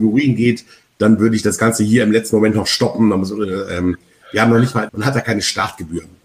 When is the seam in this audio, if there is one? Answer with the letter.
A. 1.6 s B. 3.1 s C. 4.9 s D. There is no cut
C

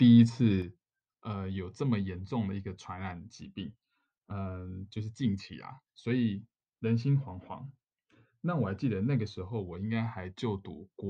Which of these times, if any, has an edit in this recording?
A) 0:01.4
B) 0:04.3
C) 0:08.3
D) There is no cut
D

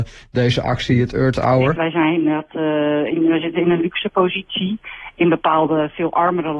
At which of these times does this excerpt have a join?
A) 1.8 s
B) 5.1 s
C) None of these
A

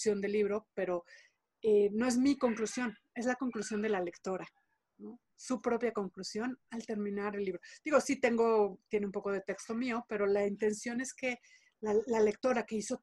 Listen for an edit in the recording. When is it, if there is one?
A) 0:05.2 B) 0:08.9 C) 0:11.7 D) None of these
D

